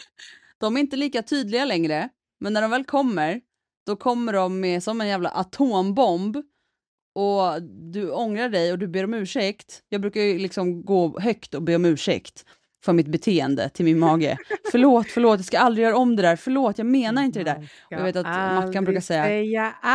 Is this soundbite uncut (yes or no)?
yes